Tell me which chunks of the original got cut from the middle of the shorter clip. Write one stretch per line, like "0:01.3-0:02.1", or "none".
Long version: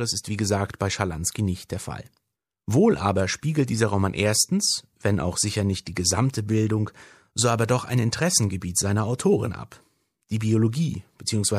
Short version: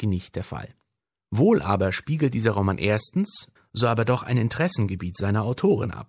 0:04.9-0:07.2